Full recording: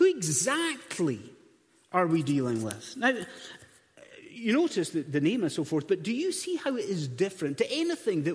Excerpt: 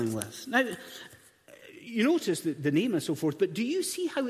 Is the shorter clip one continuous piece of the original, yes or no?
yes